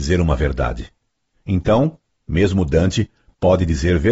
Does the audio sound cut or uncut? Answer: uncut